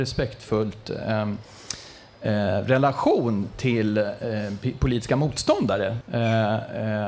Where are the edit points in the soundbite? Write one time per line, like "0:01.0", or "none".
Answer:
0:06.0

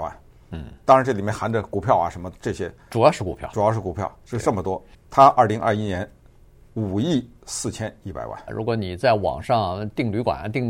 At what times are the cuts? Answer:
0:04.9
0:08.5

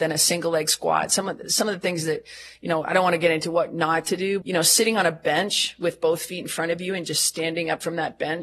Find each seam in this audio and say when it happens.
0:04.4

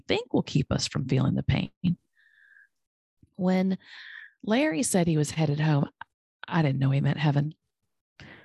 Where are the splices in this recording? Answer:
0:03.2

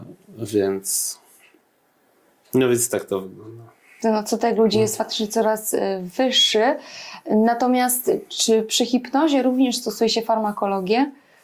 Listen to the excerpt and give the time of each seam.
none

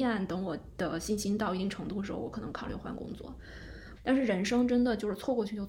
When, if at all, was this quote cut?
0:04.0

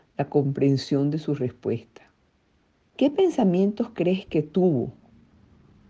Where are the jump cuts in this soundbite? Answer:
0:02.9

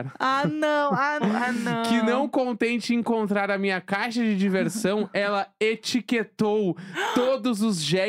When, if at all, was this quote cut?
0:01.2

